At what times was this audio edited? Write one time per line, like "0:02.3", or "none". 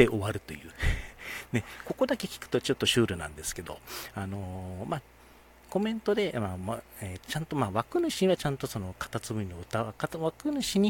none

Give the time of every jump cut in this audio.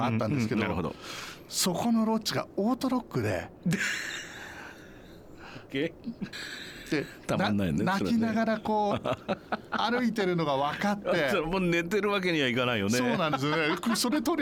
0:06.3

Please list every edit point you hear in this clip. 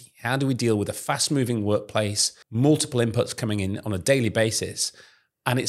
0:02.4

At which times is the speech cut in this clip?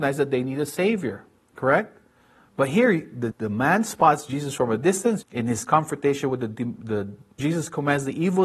0:03.3
0:05.2
0:07.4

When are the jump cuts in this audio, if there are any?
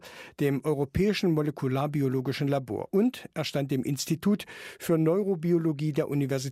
none

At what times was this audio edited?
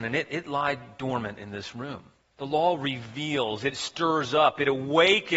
0:02.2

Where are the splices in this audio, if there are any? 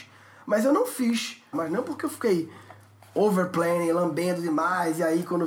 0:01.5

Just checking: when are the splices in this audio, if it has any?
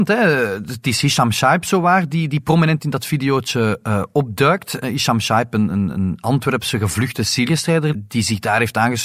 none

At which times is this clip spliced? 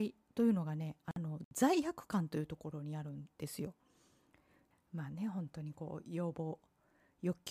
0:04.7

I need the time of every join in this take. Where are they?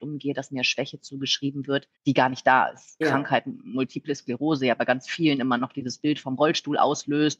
0:02.0
0:03.0

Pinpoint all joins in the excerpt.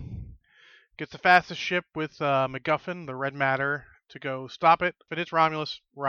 0:05.1

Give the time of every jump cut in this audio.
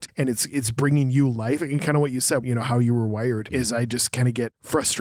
0:02.4
0:03.5

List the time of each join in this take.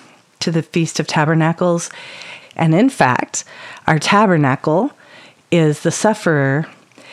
0:02.4

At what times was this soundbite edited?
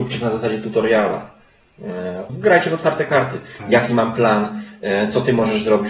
0:02.3

